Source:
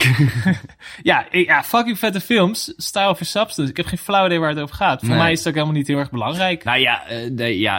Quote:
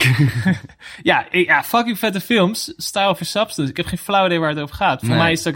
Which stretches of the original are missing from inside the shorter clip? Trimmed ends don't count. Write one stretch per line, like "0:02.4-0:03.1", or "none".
none